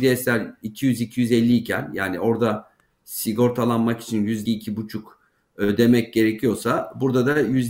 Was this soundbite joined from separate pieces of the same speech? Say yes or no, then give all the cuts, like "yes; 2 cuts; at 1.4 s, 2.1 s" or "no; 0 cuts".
yes; 1 cut; at 4.5 s